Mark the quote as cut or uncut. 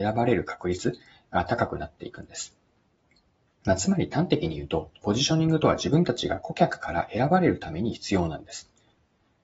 uncut